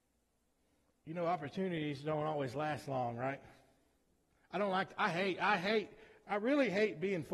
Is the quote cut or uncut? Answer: uncut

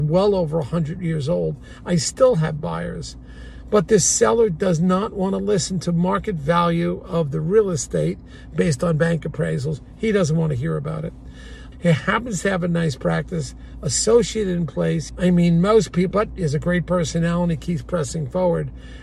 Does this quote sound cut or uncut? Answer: cut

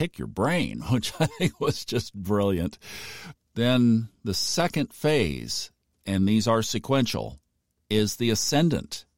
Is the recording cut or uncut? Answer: cut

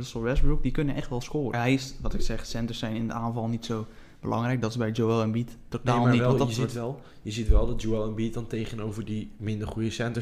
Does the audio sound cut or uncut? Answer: cut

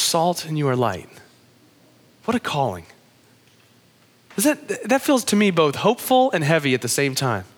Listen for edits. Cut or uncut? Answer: uncut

